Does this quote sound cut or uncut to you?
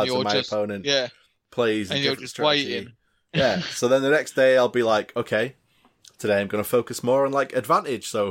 uncut